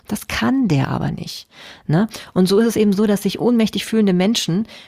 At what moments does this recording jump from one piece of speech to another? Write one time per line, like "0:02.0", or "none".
none